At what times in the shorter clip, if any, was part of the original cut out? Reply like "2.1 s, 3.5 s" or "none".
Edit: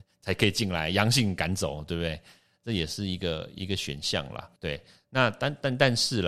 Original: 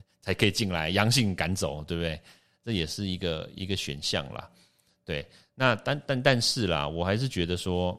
4.6 s

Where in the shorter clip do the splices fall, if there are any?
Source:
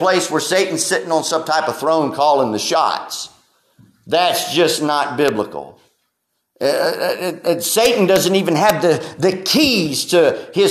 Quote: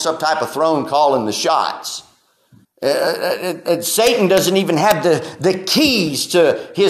2.6 s

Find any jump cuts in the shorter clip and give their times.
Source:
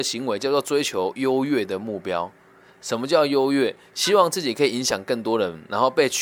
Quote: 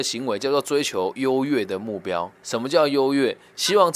2.4 s

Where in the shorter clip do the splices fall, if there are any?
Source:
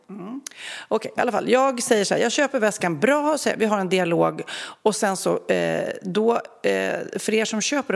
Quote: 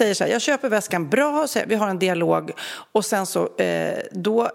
none

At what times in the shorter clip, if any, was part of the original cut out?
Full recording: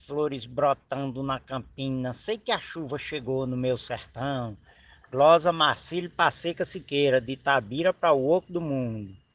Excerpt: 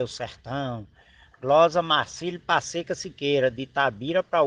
none

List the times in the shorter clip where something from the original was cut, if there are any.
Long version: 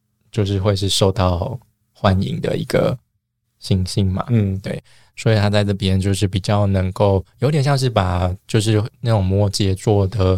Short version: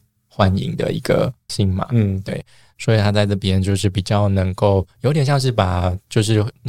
1.5 s

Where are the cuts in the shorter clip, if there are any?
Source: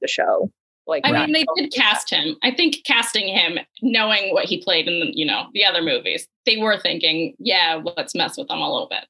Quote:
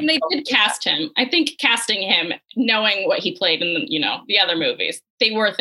none

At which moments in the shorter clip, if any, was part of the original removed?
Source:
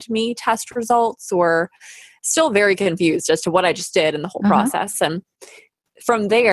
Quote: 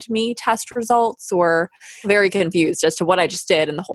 2.0 s

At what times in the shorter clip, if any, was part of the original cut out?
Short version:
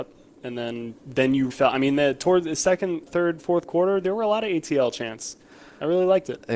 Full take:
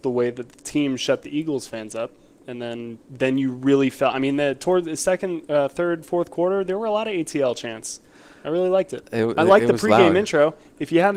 1.5 s, 3.1 s

